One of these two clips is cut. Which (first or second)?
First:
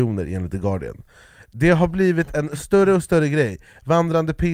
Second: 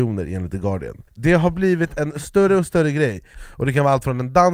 second